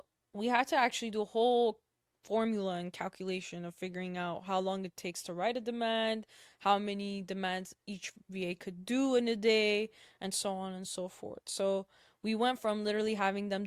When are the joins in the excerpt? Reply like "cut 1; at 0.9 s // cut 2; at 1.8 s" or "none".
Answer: none